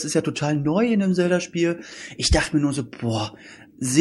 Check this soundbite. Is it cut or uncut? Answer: uncut